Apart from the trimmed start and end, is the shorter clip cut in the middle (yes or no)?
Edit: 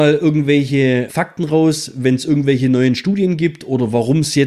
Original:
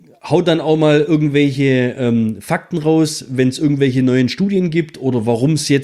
yes